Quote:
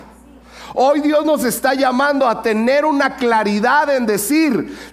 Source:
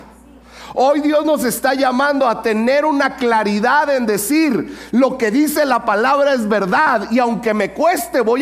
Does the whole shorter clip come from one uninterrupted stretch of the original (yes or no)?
yes